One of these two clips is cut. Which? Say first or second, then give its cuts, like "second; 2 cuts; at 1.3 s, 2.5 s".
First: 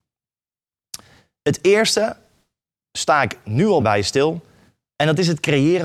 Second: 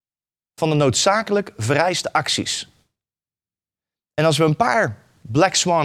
first; 1 cut; at 3.8 s